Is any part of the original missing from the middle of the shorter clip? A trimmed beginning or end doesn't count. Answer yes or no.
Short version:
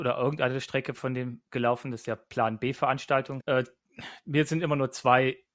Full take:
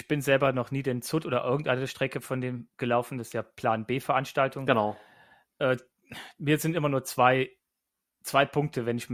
yes